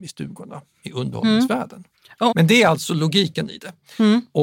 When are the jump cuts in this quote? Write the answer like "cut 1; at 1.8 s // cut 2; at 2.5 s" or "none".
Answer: cut 1; at 2.3 s